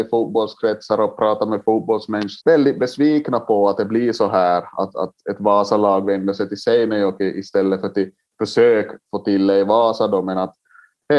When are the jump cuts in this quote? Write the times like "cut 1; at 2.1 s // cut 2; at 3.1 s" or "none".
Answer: cut 1; at 2.4 s